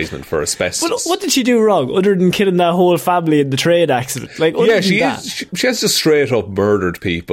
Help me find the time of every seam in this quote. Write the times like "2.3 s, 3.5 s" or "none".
none